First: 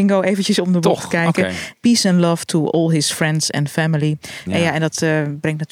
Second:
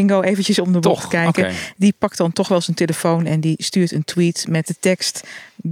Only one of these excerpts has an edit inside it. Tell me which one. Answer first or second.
first